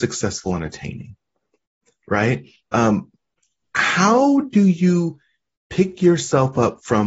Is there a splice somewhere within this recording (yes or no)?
no